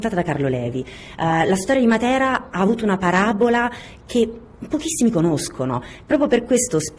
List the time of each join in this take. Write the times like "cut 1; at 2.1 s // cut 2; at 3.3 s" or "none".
none

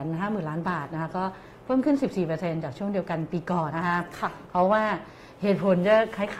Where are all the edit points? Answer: cut 1; at 3.7 s

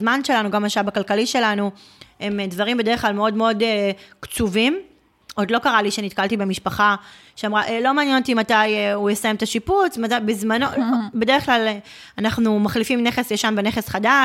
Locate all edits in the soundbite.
none

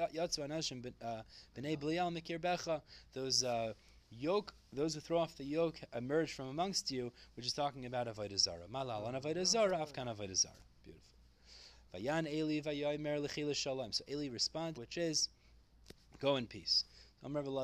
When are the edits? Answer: cut 1; at 14.8 s

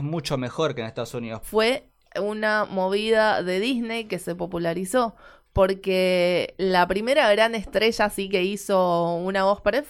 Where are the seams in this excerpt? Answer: cut 1; at 1.4 s

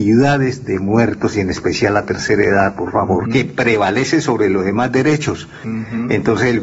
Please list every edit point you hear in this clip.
cut 1; at 3.3 s // cut 2; at 5.6 s

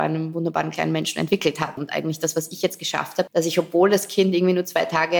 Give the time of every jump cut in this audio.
cut 1; at 1.8 s // cut 2; at 3.3 s

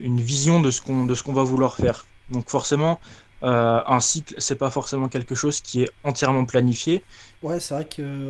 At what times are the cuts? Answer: cut 1; at 7.4 s

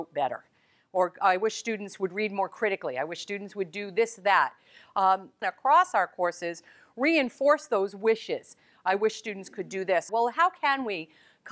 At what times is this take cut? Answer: cut 1; at 5.4 s // cut 2; at 10.1 s

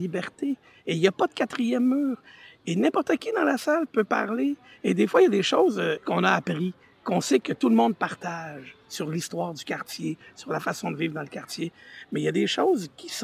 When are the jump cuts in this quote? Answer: none

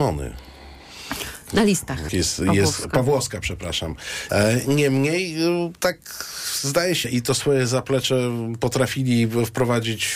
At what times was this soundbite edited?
cut 1; at 2.1 s // cut 2; at 4.3 s // cut 3; at 7.0 s

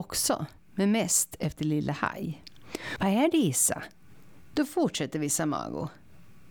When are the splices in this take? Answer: cut 1; at 3.0 s // cut 2; at 4.5 s

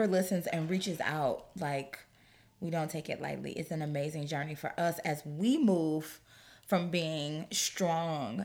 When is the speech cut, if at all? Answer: none

